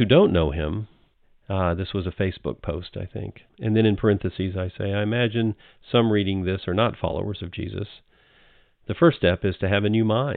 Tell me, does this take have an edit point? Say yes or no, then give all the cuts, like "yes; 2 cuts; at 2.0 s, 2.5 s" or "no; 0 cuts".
yes; 1 cut; at 3.5 s